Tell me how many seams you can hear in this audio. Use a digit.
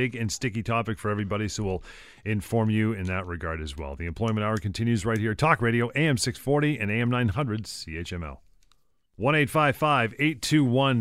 0